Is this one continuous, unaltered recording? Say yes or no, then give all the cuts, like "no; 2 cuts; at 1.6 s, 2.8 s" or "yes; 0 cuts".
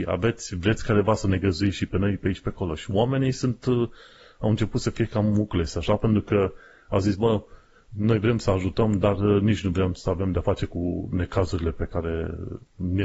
yes; 0 cuts